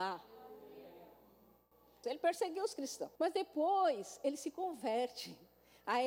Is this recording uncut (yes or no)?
no